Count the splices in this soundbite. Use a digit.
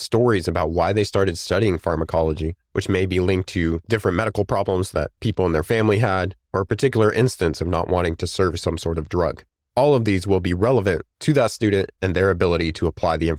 0